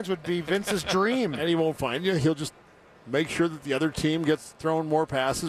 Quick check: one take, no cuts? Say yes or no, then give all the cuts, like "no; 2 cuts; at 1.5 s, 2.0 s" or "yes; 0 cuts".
yes; 0 cuts